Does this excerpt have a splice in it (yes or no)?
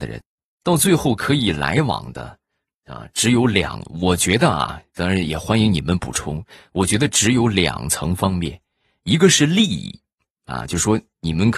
no